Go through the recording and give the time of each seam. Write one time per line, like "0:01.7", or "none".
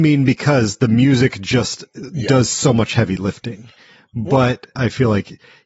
0:04.8